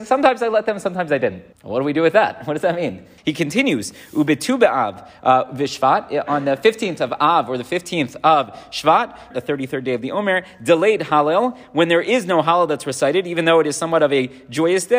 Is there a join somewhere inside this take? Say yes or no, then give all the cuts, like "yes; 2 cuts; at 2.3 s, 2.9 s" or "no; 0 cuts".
yes; 3 cuts; at 1.5 s, 3.2 s, 9.3 s